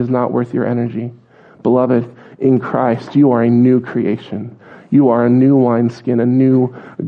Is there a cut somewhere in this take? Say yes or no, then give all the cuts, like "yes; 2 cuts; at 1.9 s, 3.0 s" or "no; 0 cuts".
no; 0 cuts